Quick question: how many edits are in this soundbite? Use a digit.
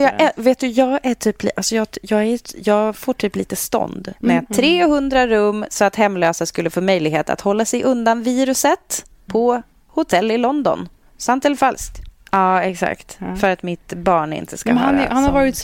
3